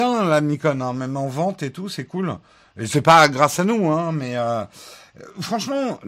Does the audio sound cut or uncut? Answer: uncut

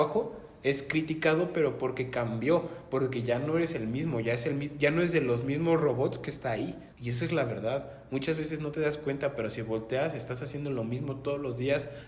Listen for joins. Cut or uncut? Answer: cut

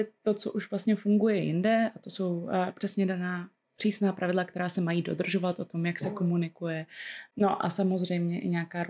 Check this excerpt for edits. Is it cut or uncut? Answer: uncut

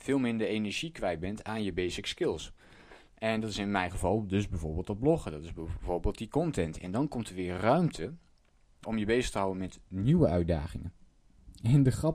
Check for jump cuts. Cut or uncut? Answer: cut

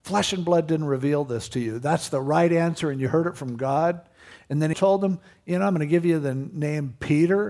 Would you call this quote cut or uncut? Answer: cut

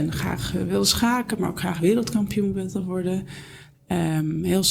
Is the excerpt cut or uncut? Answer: uncut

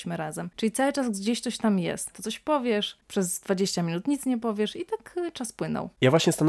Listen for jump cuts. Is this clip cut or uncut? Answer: cut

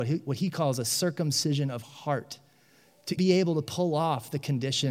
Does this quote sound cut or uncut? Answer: cut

